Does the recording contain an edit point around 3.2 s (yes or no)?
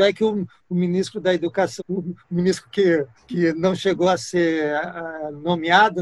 yes